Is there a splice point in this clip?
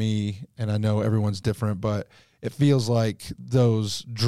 no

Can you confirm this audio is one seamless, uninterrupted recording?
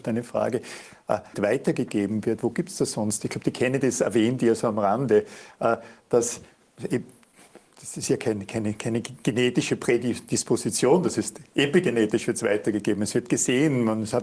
no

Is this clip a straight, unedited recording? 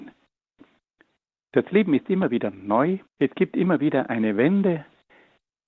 no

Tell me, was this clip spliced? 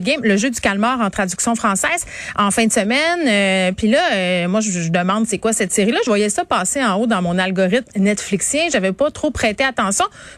no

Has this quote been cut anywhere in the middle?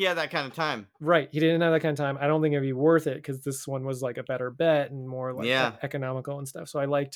no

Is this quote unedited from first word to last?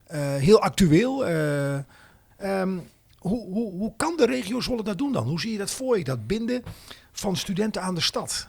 no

